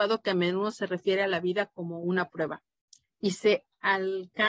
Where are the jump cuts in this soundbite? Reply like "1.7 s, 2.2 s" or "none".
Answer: none